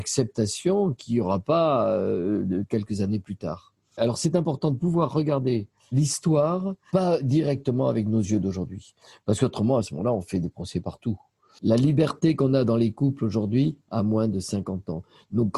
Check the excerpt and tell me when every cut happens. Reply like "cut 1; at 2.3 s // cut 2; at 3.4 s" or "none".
none